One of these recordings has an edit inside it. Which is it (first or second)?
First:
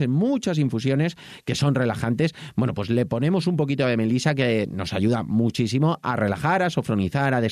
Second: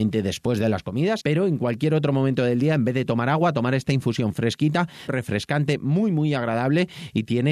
second